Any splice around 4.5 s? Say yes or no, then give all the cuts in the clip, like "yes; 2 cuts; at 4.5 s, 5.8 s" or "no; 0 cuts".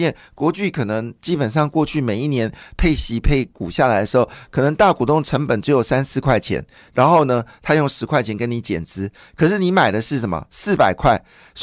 no; 0 cuts